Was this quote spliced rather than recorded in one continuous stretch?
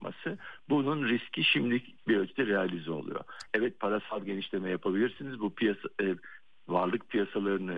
yes; 1 cut; at 3.5 s

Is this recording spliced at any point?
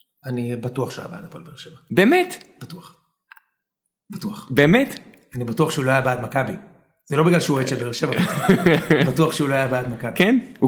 no; 0 cuts

